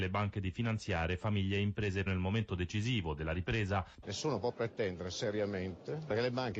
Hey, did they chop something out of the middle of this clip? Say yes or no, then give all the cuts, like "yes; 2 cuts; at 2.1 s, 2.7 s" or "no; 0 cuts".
yes; 2 cuts; at 2.1 s, 4.0 s